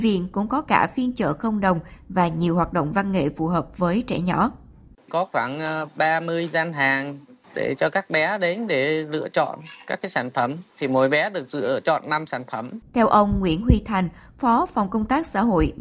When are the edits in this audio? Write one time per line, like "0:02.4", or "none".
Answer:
0:12.8